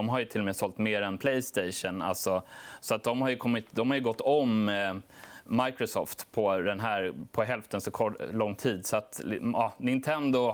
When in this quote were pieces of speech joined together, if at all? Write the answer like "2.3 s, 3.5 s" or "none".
none